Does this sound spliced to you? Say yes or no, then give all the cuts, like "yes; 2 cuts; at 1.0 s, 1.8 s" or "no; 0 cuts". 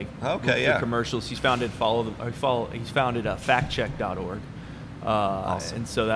no; 0 cuts